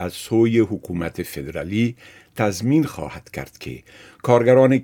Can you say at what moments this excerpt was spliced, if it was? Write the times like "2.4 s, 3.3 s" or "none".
none